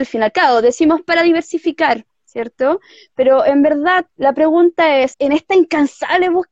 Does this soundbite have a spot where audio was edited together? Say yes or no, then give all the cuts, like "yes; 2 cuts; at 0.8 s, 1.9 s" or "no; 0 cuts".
yes; 2 cuts; at 4.1 s, 5.1 s